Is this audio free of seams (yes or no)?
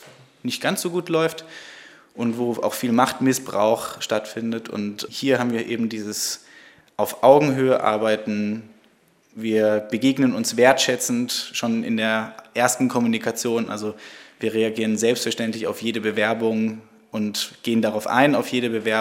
no